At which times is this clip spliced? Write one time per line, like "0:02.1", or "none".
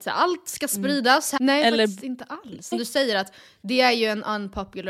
0:01.4
0:02.7